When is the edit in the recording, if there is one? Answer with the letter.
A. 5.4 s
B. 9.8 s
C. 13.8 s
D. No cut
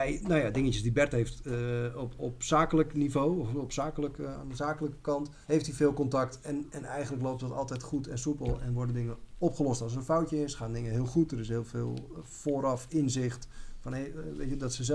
A